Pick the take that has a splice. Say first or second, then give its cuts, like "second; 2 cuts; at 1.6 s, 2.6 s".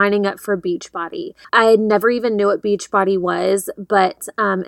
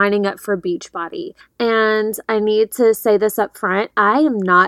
second; 1 cut; at 1.4 s